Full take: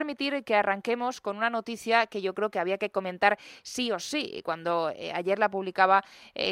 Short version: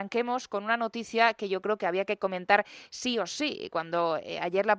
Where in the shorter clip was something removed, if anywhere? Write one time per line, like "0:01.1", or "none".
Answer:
none